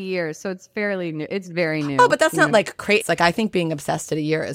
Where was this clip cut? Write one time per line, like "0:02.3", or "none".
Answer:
0:03.0